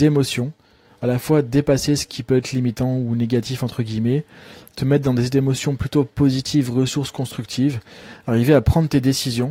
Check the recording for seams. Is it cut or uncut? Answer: uncut